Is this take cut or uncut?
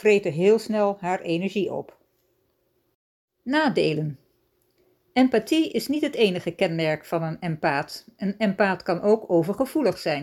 uncut